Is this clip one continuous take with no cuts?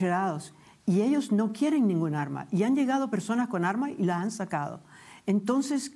yes; 0 cuts

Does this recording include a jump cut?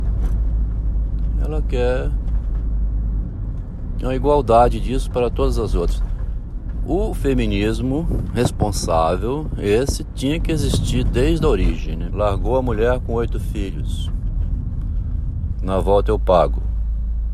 yes; 2 cuts; at 12.1 s, 15.5 s

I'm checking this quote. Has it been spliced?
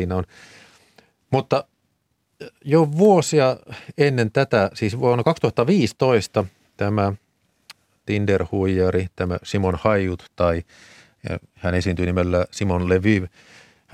no; 0 cuts

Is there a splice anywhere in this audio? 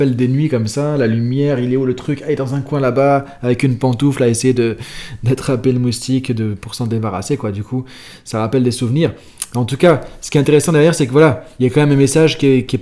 no; 0 cuts

